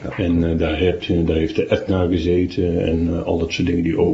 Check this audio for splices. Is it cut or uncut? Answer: uncut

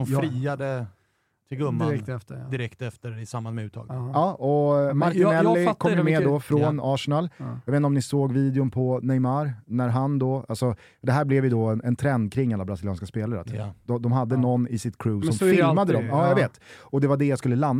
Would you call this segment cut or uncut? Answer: uncut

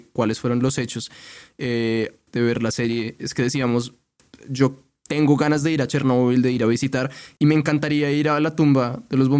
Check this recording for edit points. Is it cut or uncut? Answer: cut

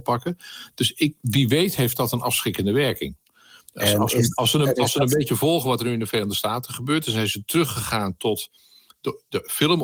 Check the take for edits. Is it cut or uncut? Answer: uncut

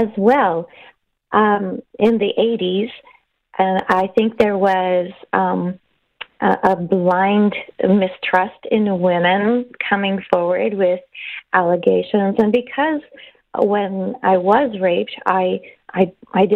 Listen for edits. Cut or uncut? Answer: uncut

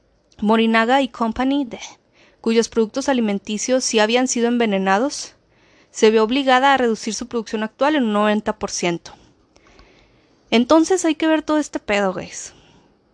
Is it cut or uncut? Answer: uncut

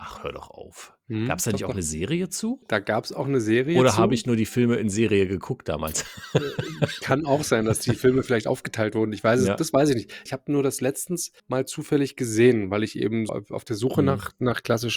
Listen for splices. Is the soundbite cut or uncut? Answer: cut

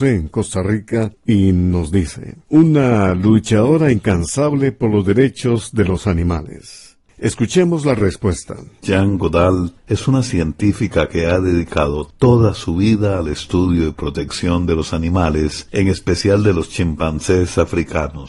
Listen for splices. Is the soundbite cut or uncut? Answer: cut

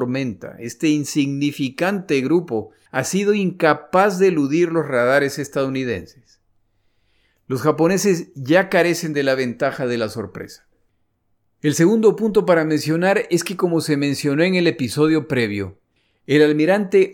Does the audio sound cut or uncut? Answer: uncut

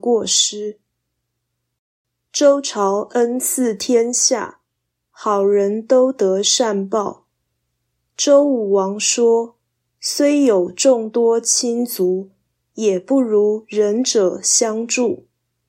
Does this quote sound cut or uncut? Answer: uncut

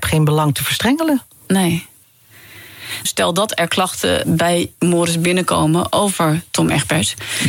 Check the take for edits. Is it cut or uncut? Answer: cut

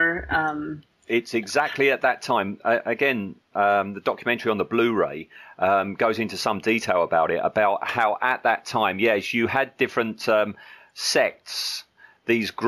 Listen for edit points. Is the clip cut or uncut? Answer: uncut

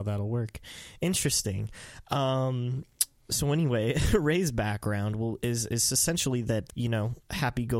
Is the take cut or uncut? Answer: cut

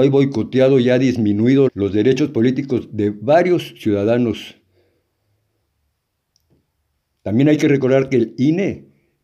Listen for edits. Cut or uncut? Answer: cut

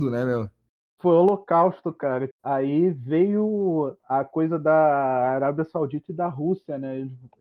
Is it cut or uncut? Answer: cut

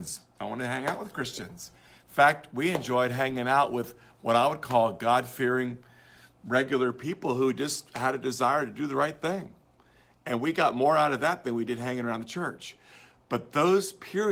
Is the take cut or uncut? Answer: uncut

